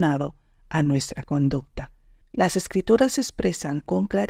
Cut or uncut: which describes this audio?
cut